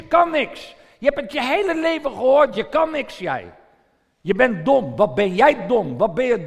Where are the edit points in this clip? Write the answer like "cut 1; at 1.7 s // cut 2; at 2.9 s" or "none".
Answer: none